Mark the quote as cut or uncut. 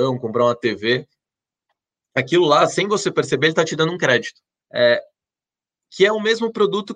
cut